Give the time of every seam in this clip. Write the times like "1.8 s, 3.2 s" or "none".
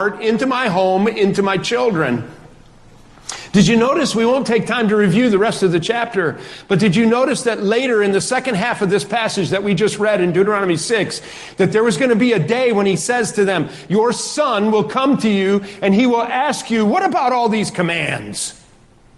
none

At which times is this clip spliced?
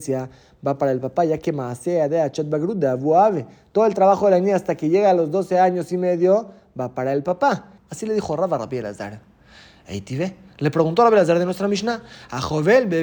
7.8 s

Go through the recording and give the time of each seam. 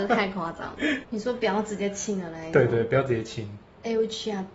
1.0 s

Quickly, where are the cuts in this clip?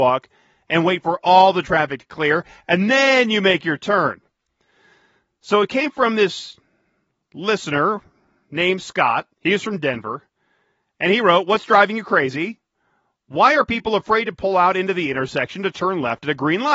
9.3 s

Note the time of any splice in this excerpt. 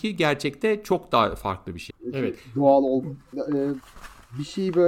1.9 s, 3.3 s

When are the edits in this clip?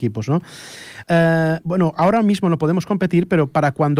1.0 s

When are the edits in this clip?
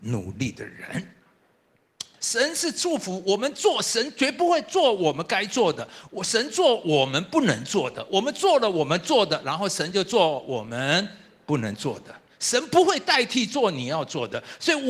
2.2 s

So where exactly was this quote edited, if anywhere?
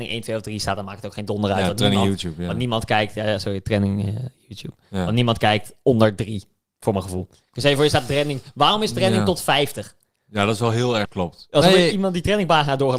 11.0 s

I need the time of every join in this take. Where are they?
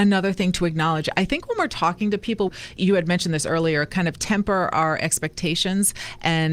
none

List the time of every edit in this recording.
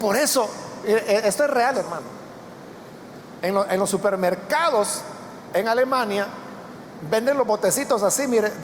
1.7 s

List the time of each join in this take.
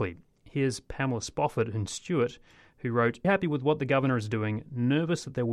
3.2 s

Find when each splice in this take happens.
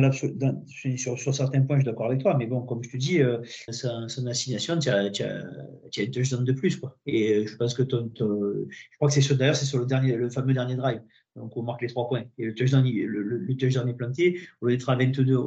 3.7 s

